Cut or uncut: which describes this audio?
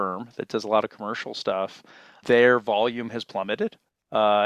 cut